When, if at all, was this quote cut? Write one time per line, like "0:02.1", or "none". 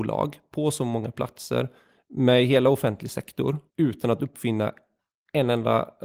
0:03.7